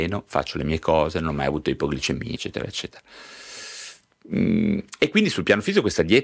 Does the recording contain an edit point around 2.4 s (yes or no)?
yes